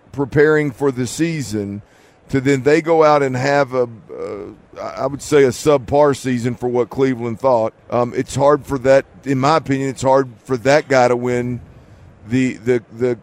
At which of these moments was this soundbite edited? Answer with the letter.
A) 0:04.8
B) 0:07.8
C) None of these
B